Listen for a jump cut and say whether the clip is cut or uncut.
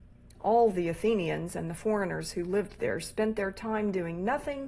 uncut